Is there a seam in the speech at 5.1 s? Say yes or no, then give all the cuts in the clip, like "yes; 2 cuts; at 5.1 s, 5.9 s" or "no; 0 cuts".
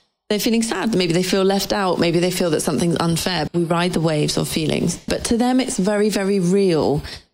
yes; 2 cuts; at 3.5 s, 5.1 s